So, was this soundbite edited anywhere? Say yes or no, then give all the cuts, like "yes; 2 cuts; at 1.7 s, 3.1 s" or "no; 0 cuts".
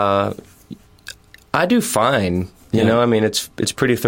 no; 0 cuts